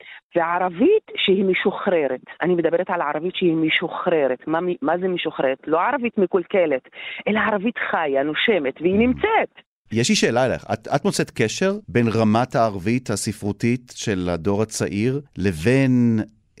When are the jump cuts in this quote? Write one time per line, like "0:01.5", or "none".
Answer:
0:09.9
0:11.8
0:15.3